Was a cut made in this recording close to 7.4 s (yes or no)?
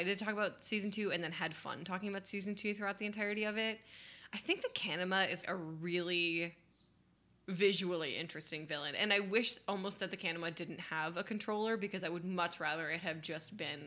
no